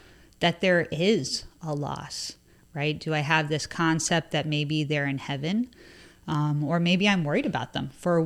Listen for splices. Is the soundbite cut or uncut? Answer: cut